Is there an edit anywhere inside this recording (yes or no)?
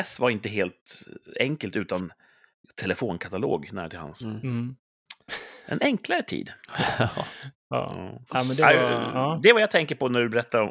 yes